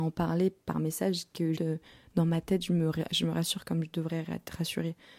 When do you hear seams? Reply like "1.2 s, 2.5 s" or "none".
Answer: 1.6 s